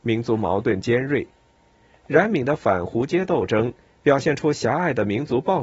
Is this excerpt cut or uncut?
uncut